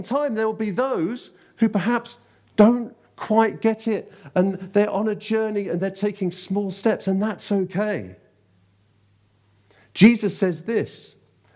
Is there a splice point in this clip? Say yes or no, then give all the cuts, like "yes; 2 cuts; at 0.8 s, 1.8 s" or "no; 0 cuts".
no; 0 cuts